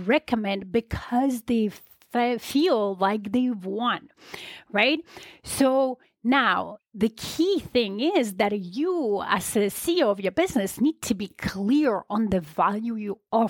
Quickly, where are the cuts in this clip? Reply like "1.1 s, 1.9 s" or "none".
6.8 s